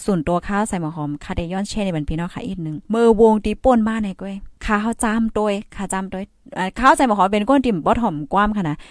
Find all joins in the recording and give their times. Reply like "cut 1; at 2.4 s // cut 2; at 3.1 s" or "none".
cut 1; at 2.8 s // cut 2; at 4.6 s